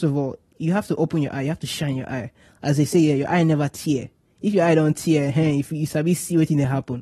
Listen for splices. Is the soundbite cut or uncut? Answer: uncut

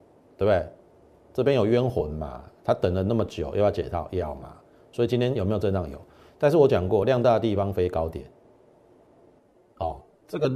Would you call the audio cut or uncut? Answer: uncut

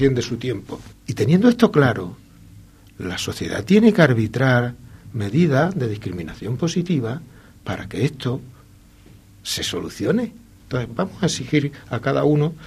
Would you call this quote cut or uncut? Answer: cut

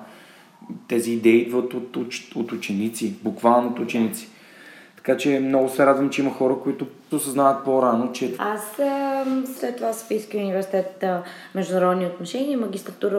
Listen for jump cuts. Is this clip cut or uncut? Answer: cut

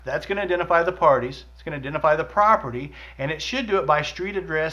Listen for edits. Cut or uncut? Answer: uncut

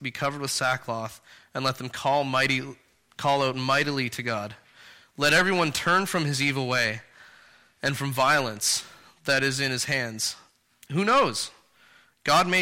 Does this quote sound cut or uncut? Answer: uncut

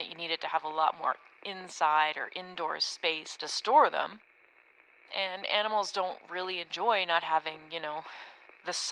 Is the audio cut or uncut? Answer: uncut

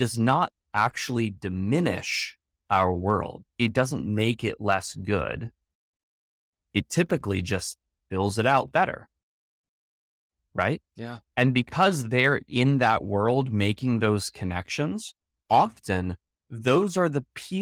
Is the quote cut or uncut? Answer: uncut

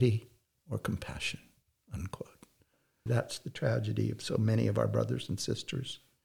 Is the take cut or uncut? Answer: cut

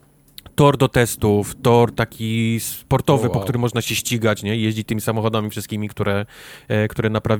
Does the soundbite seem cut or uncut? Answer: uncut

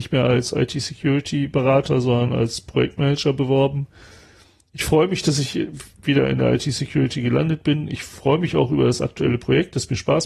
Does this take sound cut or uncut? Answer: uncut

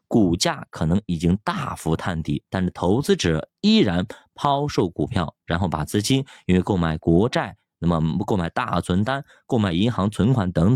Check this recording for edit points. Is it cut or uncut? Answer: uncut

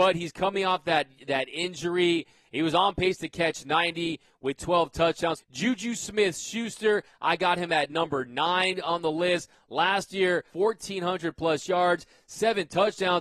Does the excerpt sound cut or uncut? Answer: cut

